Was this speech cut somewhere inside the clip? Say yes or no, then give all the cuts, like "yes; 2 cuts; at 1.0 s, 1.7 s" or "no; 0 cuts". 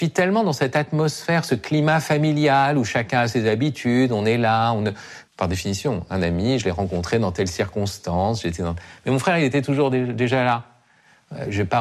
yes; 1 cut; at 5.3 s